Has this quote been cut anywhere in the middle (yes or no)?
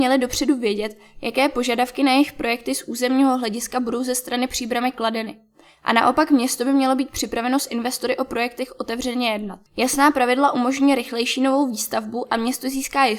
yes